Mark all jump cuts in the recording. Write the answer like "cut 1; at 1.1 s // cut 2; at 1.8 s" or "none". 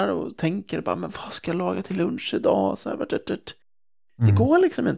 cut 1; at 3.1 s